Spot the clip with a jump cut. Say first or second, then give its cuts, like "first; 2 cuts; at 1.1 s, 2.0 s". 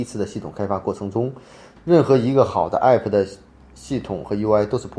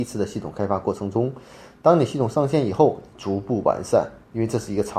first; 1 cut; at 1.8 s